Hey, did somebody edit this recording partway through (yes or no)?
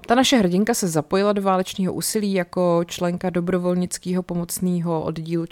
no